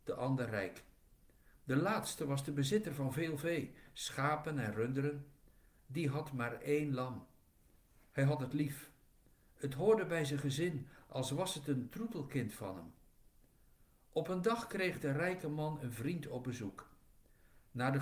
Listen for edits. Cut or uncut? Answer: cut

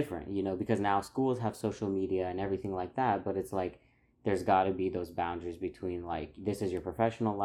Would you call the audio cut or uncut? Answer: uncut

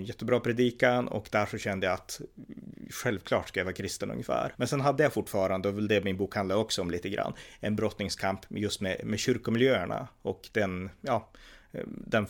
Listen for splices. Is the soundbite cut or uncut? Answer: cut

